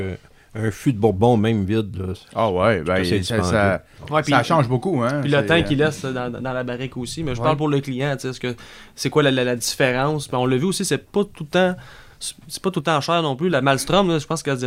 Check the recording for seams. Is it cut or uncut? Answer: uncut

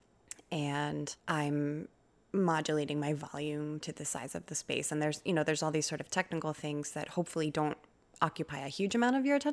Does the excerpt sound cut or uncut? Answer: uncut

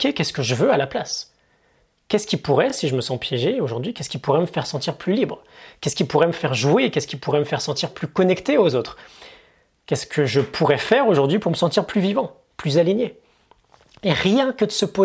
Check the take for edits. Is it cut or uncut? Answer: uncut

